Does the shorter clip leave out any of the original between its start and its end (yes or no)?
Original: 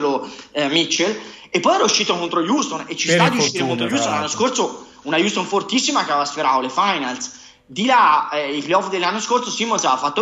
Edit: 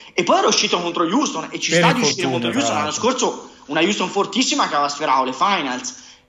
no